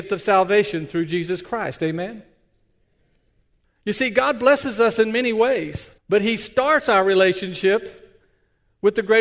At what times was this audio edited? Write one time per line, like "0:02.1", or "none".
0:03.6
0:06.0